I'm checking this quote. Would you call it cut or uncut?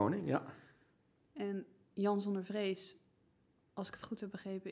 uncut